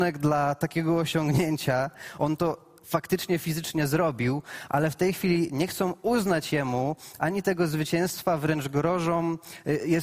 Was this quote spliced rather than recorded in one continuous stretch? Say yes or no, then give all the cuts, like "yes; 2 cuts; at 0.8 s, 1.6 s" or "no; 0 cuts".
no; 0 cuts